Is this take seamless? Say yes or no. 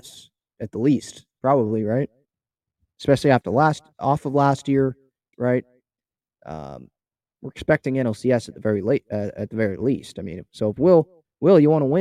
no